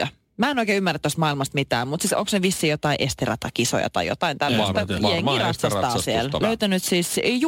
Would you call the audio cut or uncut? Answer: cut